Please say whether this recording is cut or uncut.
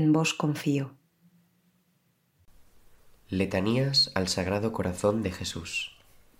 uncut